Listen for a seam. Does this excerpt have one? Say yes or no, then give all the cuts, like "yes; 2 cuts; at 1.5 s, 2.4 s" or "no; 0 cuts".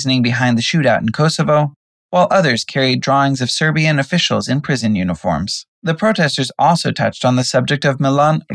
yes; 1 cut; at 5.7 s